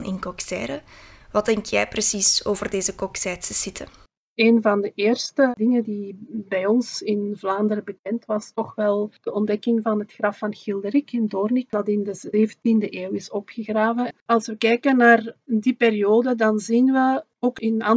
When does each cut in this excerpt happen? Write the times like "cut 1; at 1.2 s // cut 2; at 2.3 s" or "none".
cut 1; at 8.3 s